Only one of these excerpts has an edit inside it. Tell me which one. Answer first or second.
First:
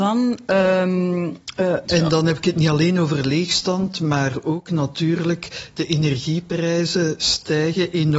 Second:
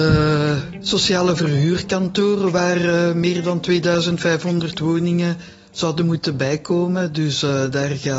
first